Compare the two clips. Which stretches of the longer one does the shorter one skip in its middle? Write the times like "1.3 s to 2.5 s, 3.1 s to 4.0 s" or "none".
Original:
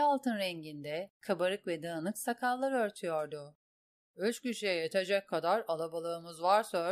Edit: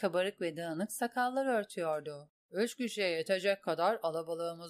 3.6 s to 4.0 s